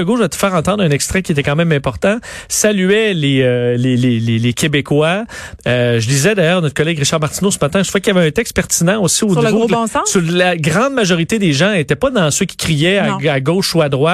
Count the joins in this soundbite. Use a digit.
0